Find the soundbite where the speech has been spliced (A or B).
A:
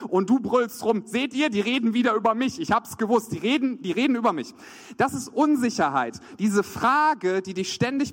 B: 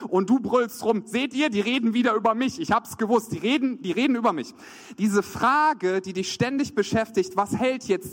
B